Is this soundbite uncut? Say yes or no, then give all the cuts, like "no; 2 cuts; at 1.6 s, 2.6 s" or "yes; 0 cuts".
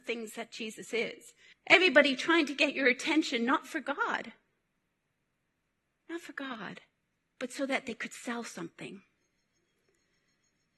no; 1 cut; at 1.5 s